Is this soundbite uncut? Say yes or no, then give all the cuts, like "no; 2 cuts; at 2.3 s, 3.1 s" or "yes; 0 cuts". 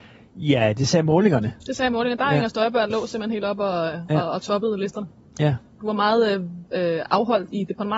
yes; 0 cuts